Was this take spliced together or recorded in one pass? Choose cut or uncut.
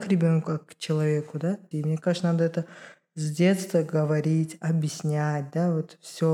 cut